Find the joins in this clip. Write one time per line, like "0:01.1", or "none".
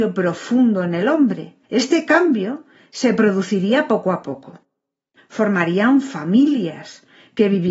0:01.6
0:05.2

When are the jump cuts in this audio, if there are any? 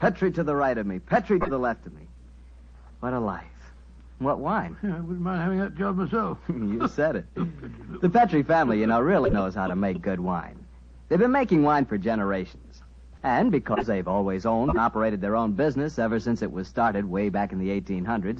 none

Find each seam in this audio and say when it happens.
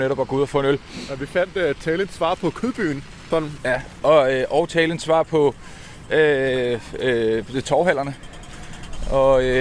0:03.6

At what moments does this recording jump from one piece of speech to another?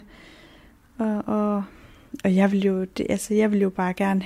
none

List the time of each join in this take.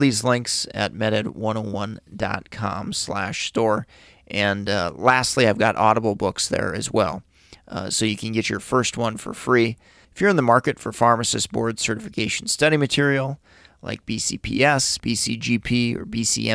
0:10.0
0:15.0

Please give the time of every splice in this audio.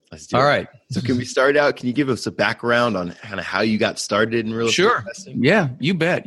none

